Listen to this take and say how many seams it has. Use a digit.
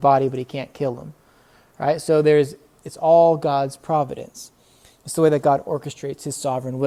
1